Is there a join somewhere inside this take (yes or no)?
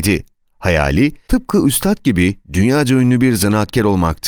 yes